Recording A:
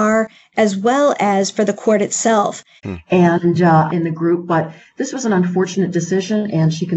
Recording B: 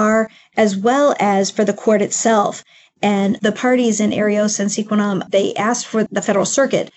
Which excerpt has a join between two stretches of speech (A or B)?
A